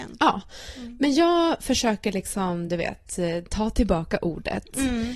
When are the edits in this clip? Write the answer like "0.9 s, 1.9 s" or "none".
none